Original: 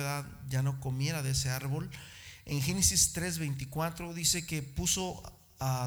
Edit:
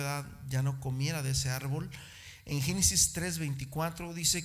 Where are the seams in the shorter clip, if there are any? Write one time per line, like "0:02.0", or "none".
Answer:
none